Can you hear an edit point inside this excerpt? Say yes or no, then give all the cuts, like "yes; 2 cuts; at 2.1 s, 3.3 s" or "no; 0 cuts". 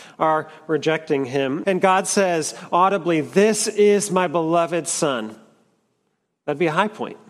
yes; 1 cut; at 1.6 s